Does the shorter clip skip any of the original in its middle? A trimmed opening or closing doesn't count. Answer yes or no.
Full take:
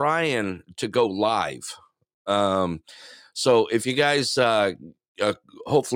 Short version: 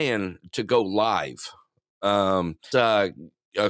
yes